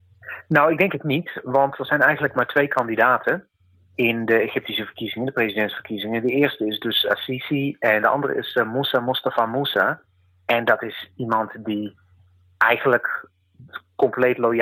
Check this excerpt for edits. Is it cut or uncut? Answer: cut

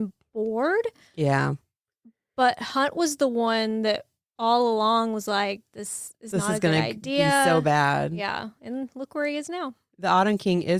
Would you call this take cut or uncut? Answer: uncut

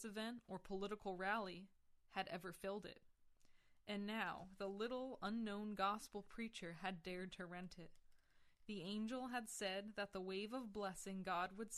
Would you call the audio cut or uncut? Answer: uncut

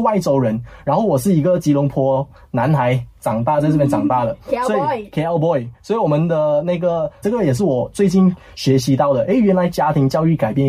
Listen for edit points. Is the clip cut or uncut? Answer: cut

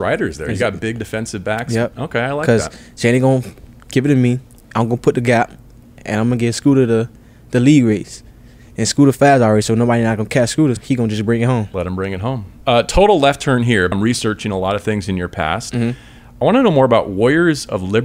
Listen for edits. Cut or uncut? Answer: cut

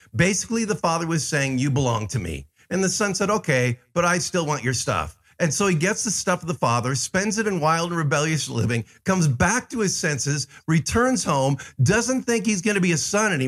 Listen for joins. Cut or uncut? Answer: uncut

